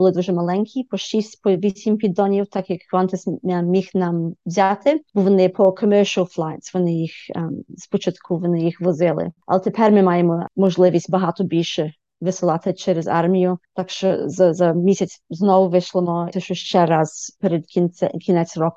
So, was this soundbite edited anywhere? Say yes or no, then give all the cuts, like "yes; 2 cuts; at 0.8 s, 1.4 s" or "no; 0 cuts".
yes; 2 cuts; at 13.6 s, 16.3 s